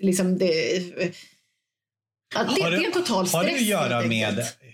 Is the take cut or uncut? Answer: uncut